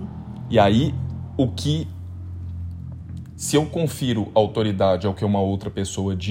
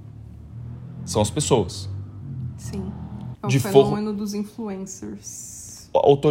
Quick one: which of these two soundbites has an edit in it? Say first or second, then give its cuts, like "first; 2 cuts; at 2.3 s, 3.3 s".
second; 1 cut; at 3.3 s